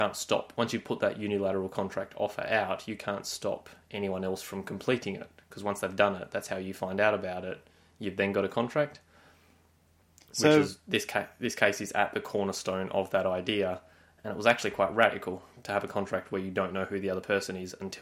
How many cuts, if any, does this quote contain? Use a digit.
0